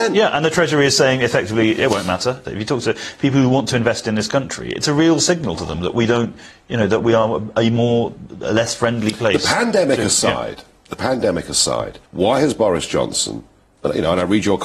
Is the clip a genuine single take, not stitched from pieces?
no; 2 cuts; at 2.4 s, 12.0 s

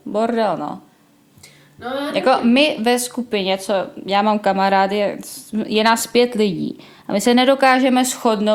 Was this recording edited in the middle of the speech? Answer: no; 0 cuts

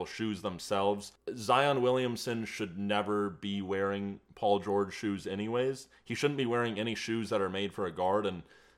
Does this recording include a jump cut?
no; 0 cuts

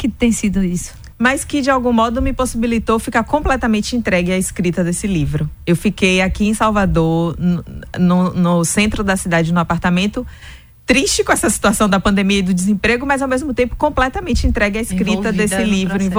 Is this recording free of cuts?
no; 1 cut; at 1.1 s

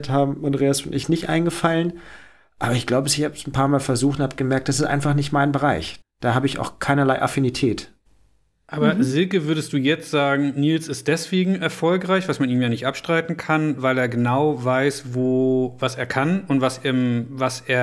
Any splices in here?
yes; 1 cut; at 6.0 s

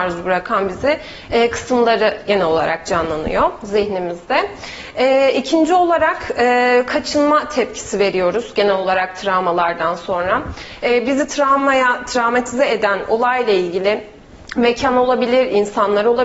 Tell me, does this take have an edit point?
no; 0 cuts

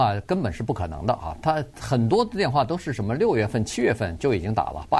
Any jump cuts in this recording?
no; 0 cuts

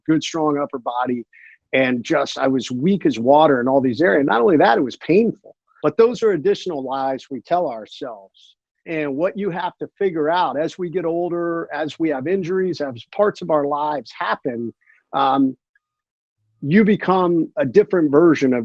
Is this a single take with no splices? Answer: no; 2 cuts; at 5.8 s, 8.9 s

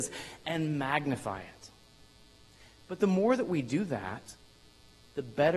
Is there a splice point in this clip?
no; 0 cuts

